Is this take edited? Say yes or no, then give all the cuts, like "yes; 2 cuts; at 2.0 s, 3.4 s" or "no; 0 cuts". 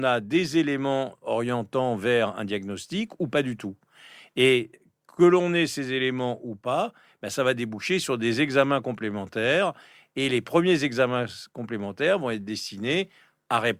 no; 0 cuts